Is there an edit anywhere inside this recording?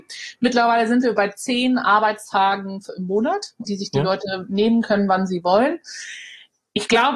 yes; 1 cut; at 3.6 s

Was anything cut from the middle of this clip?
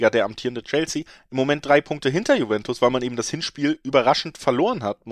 no; 0 cuts

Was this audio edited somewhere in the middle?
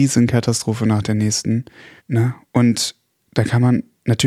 yes; 1 cut; at 2.0 s

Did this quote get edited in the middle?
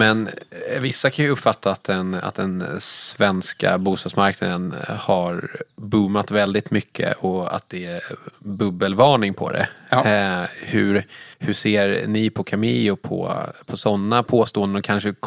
yes; 1 cut; at 11.3 s

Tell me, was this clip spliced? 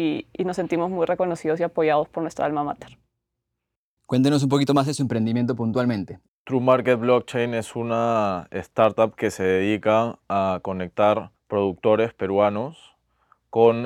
yes; 2 cuts; at 6.3 s, 11.4 s

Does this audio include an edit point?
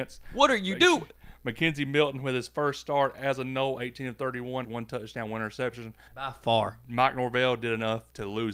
yes; 2 cuts; at 4.6 s, 6.1 s

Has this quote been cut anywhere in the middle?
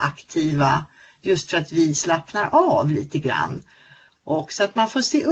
no; 0 cuts

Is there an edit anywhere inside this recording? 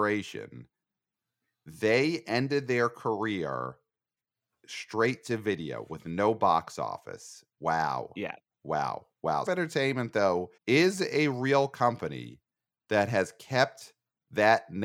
yes; 2 cuts; at 9.5 s, 10.6 s

